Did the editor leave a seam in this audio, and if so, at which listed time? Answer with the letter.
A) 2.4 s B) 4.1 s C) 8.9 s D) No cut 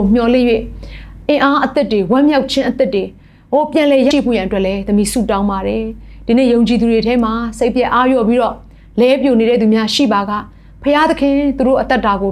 B